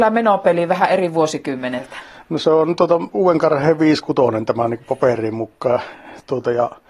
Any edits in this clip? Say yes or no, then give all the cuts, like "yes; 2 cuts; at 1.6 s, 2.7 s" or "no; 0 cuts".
no; 0 cuts